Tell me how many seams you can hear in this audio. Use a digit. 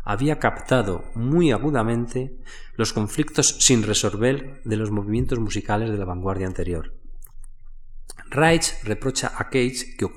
0